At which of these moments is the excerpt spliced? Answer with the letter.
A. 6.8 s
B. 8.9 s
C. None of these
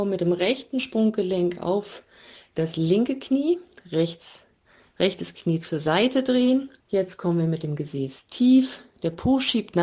A